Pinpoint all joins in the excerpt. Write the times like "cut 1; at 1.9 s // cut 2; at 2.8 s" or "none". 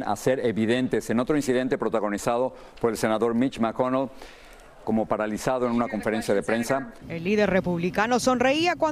cut 1; at 4.8 s // cut 2; at 7.0 s